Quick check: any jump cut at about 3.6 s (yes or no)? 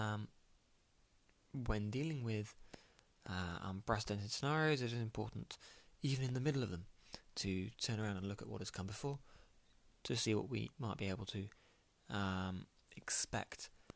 no